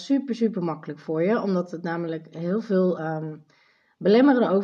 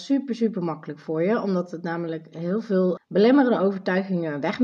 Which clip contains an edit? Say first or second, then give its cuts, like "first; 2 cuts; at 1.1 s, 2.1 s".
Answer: second; 1 cut; at 3.0 s